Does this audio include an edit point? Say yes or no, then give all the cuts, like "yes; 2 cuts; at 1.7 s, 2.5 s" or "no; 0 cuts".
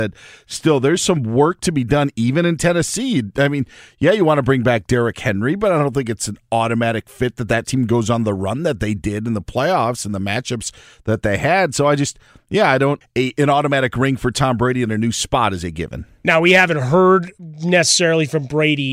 yes; 1 cut; at 13.0 s